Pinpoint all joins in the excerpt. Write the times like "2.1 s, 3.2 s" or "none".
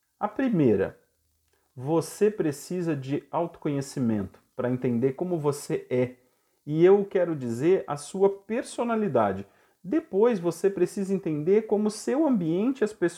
none